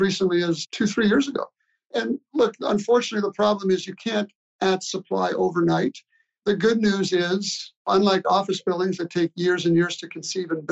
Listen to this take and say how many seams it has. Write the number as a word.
zero